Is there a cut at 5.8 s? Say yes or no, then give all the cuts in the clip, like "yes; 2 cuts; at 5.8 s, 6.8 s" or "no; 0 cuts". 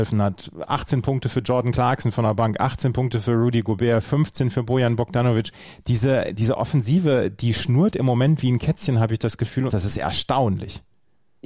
no; 2 cuts; at 4.0 s, 9.7 s